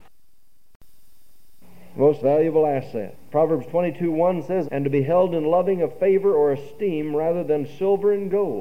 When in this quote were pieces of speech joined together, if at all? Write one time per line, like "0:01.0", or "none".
0:04.6